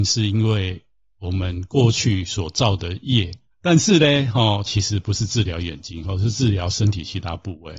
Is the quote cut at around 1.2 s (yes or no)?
no